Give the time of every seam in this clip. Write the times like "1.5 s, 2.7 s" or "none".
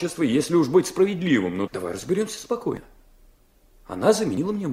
1.7 s